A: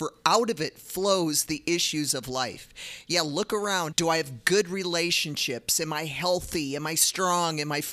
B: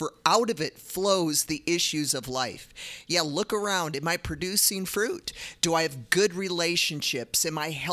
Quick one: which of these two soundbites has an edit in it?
A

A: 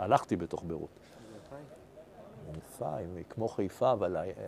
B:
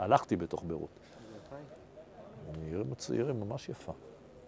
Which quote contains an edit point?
A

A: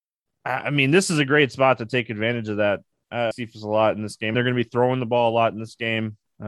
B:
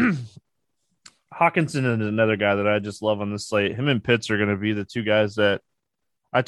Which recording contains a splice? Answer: A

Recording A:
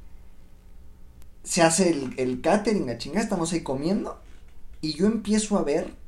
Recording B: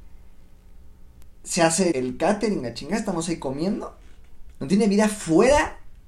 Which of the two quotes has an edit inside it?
B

